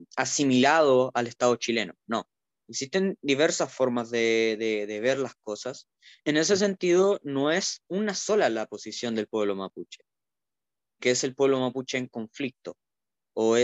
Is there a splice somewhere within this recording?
yes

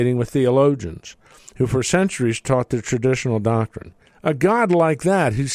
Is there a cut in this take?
yes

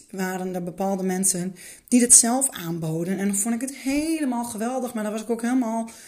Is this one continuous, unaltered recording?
yes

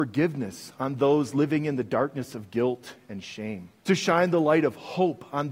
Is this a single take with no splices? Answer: no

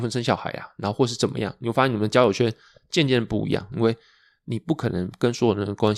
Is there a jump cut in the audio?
yes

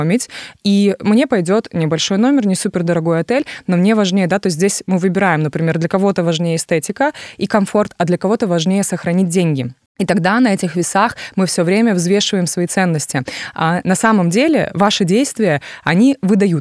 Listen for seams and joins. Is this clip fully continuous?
yes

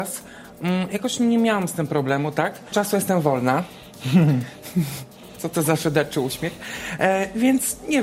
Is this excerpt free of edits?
no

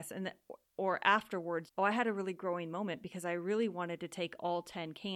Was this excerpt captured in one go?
no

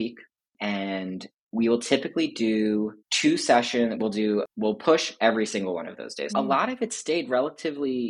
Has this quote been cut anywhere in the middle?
yes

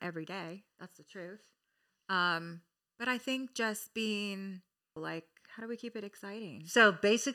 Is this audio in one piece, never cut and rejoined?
no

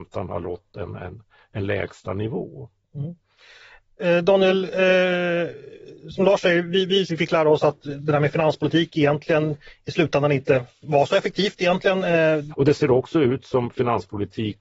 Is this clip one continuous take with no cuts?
no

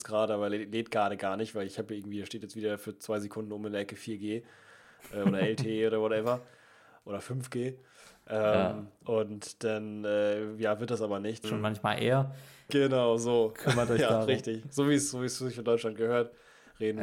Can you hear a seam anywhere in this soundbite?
yes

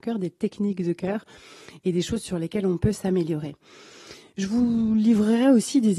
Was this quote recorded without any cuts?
yes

